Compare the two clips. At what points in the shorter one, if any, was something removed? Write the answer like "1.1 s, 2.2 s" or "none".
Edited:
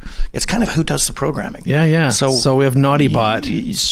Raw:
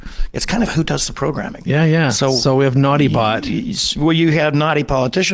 none

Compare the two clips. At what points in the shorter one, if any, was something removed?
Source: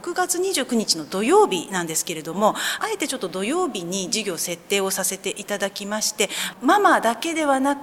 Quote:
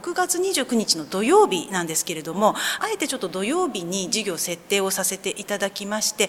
none

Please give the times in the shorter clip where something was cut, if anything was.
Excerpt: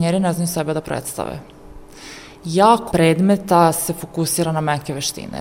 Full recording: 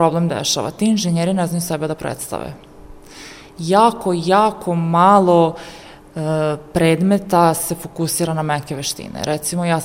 2.9 s

